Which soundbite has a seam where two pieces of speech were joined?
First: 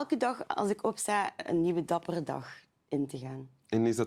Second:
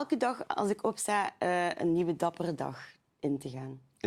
first; 1 cut; at 1.4 s

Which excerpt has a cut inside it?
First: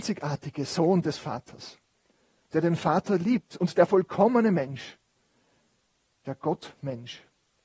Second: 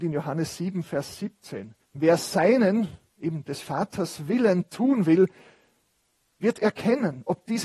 second; 1 cut; at 1.8 s

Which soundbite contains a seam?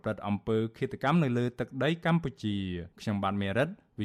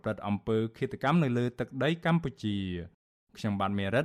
first; 1 cut; at 2.9 s

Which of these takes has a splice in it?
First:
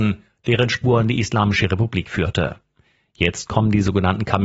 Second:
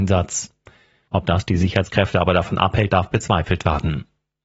second; 2 cuts; at 1.1 s, 2.9 s

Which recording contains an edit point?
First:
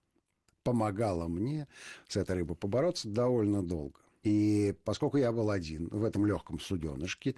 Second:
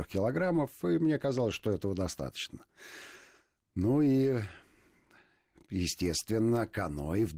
first; 1 cut; at 4.1 s

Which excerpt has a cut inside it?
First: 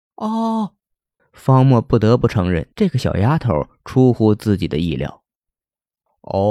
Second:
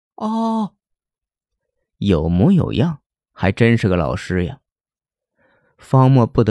first; 2 cuts; at 1.2 s, 2.7 s

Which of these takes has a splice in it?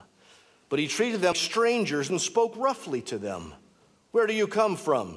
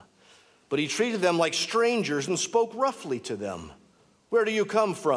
first; 1 cut; at 1.3 s

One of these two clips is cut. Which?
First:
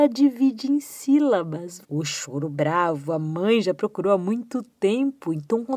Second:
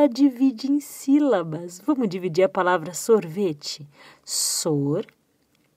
first; 1 cut; at 1.8 s

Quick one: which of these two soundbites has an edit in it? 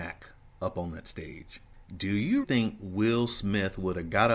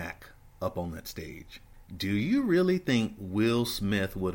first; 1 cut; at 2.4 s

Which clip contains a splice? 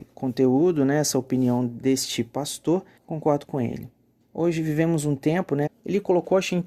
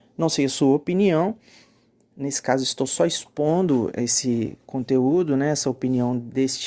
first; 2 cuts; at 3.0 s, 5.7 s

